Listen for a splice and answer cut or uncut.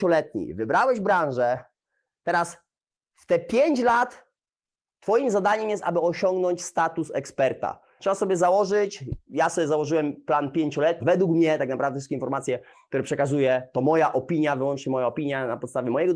cut